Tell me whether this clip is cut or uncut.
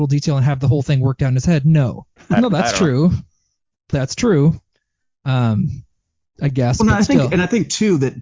cut